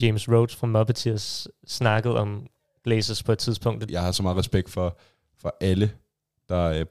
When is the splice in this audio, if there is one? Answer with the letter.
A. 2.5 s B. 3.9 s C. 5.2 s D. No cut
B